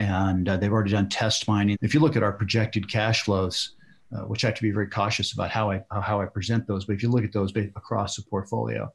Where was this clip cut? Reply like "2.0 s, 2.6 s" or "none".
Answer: 1.7 s